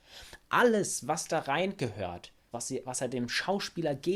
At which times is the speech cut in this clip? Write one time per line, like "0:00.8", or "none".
0:02.5